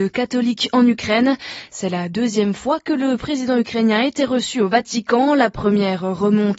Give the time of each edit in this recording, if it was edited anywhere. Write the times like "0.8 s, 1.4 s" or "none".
none